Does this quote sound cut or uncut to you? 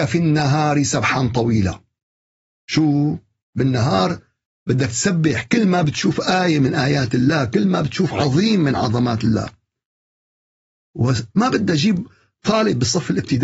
cut